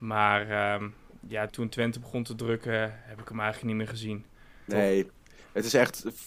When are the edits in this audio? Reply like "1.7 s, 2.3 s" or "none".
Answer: 1.5 s, 4.7 s